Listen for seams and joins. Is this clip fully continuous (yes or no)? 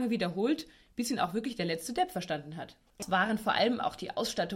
no